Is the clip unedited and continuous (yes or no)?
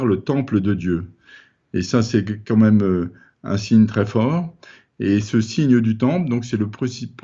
yes